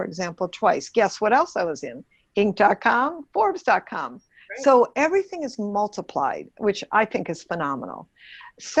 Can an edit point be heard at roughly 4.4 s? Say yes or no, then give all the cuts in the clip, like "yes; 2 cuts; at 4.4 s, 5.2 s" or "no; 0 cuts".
no; 0 cuts